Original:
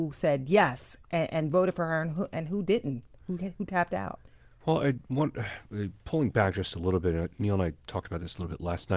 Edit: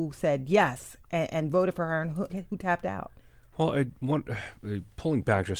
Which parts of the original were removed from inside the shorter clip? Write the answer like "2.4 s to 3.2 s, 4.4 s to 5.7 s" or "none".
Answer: 2.3 s to 3.4 s